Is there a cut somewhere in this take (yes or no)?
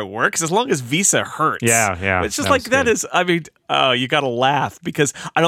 no